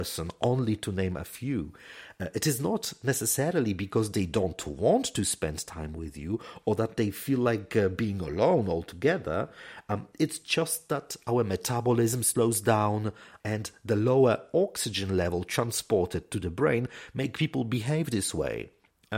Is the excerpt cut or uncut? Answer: cut